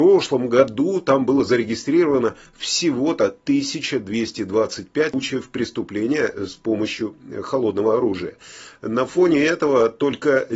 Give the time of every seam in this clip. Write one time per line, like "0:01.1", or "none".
0:05.1